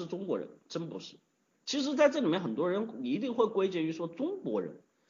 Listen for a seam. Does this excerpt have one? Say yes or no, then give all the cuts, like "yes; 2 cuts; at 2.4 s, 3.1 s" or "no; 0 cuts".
yes; 1 cut; at 1.5 s